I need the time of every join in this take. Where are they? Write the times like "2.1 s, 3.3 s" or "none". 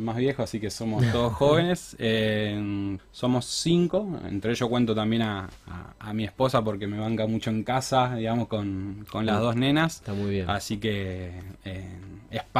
3.0 s